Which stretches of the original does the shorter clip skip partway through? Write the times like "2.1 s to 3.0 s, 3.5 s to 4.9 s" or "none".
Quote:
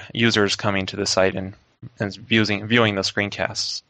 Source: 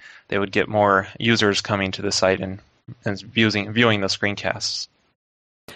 none